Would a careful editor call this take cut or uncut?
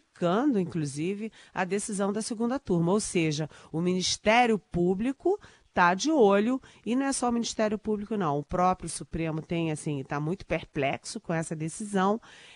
uncut